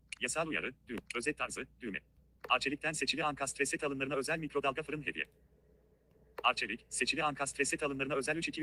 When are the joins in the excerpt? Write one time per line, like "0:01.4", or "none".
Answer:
none